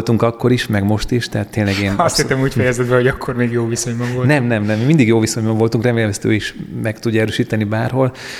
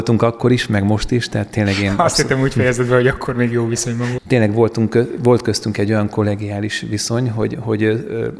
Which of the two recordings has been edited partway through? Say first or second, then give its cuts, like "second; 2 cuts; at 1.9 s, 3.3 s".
second; 1 cut; at 4.2 s